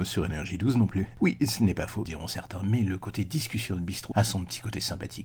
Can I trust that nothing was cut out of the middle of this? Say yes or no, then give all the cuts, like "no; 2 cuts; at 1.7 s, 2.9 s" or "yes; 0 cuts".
no; 2 cuts; at 2.0 s, 4.1 s